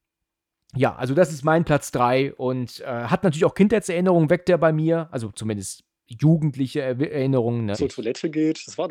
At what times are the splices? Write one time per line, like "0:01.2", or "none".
0:07.7